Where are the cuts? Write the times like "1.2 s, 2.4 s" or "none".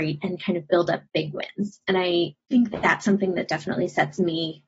2.4 s